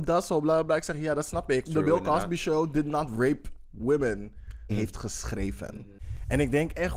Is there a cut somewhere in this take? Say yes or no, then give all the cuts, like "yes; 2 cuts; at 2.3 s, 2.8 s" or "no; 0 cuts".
yes; 2 cuts; at 1.7 s, 4.7 s